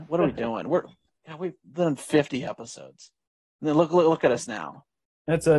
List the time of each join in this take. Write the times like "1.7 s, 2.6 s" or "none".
none